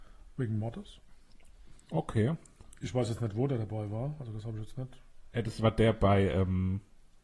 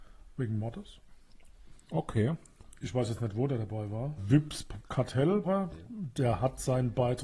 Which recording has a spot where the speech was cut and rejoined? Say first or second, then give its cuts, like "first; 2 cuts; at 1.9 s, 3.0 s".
second; 2 cuts; at 4.2 s, 5.4 s